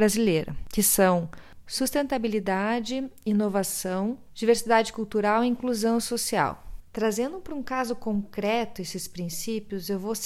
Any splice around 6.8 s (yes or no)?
yes